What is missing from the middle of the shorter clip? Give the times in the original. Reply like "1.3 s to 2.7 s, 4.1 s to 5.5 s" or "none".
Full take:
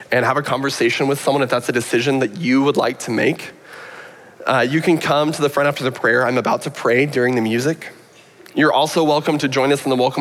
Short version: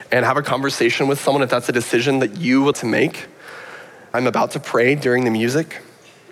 2.7 s to 3.0 s, 4.4 s to 6.2 s